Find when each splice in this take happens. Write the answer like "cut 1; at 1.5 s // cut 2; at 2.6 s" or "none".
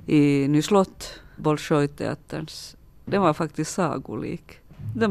cut 1; at 1.4 s